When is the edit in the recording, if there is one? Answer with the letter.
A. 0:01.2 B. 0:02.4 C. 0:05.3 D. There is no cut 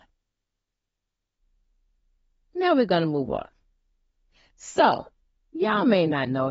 C